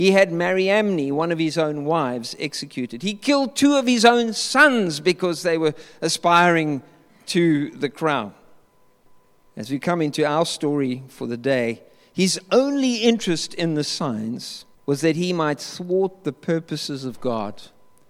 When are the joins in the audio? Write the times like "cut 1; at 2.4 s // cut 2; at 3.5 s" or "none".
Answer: cut 1; at 9.5 s // cut 2; at 14.7 s